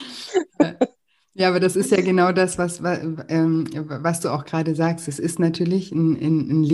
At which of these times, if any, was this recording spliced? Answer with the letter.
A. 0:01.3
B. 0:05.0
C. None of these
C